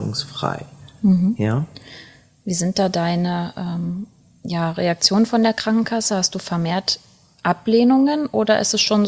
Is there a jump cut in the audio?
no; 0 cuts

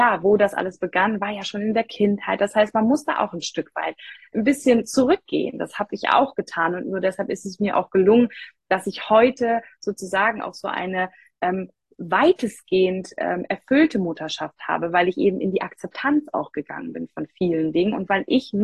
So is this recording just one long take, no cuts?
yes; 0 cuts

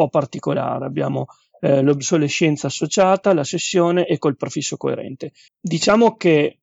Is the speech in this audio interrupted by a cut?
yes; 1 cut; at 5.5 s

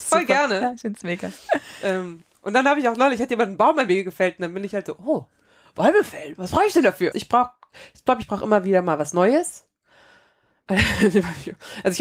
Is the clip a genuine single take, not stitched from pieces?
no; 2 cuts; at 7.1 s, 8.2 s

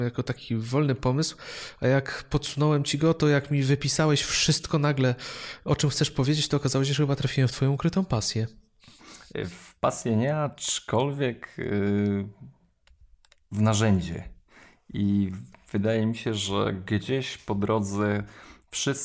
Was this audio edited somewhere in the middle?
no; 0 cuts

